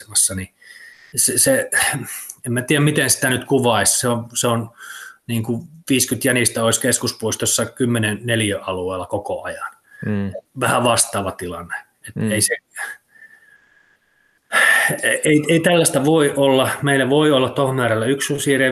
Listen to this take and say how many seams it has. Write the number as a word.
one